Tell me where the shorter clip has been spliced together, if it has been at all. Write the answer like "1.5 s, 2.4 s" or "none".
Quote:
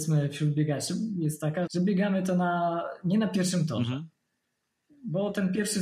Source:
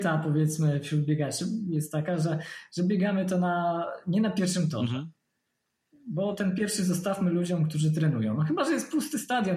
1.7 s